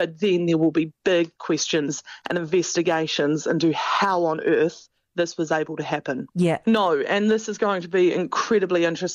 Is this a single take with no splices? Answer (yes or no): no